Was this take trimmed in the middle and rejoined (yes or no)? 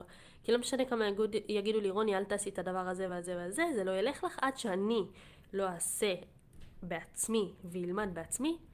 no